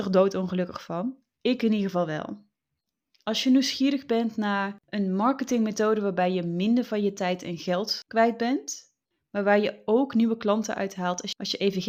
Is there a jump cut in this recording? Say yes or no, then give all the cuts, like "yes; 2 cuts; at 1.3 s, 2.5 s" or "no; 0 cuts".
no; 0 cuts